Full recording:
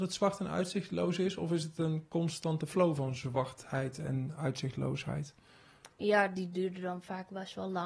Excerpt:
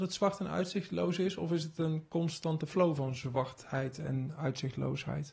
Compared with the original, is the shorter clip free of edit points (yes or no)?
yes